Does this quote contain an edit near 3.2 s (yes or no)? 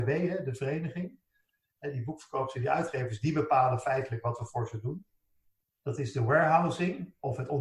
no